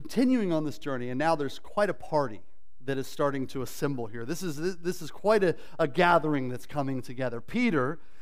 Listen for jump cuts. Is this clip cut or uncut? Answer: uncut